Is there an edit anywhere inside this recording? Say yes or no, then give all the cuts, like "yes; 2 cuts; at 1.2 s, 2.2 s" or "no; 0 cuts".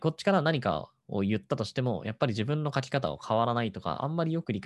no; 0 cuts